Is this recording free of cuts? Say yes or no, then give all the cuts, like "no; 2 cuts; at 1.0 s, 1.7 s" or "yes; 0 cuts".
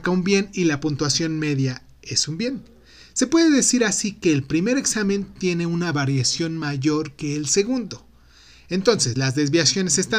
yes; 0 cuts